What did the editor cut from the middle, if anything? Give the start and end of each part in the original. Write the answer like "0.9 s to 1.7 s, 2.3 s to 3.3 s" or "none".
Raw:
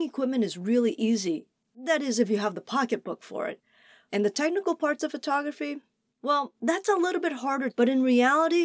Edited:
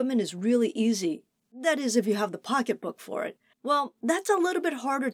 3.8 s to 6.1 s